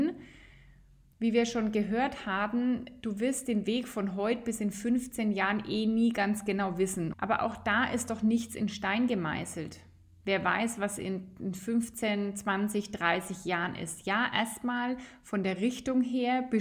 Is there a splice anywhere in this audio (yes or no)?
yes